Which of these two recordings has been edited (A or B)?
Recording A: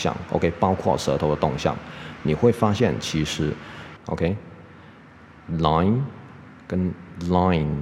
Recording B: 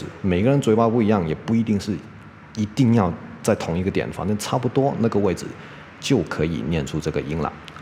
A